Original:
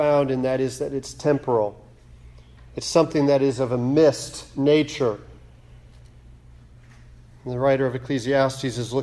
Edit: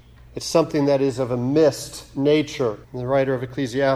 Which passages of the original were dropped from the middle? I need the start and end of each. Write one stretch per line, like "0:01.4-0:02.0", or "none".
0:05.2-0:07.4